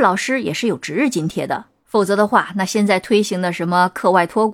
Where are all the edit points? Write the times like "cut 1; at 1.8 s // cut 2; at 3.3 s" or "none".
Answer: cut 1; at 1.8 s